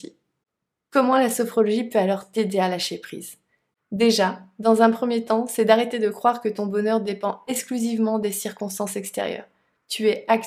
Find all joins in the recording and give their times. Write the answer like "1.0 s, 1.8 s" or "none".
none